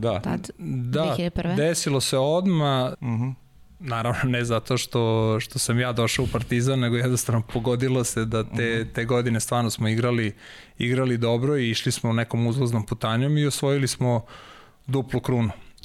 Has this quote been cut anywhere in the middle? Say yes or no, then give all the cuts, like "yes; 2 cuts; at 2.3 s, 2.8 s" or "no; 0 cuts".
yes; 1 cut; at 2.9 s